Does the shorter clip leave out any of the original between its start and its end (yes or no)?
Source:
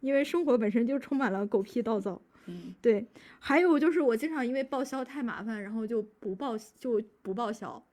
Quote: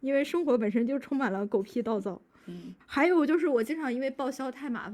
yes